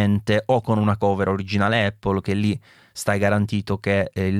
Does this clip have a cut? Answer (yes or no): no